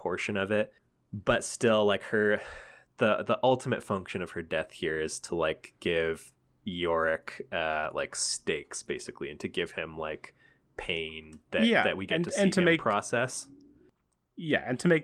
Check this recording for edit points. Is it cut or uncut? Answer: uncut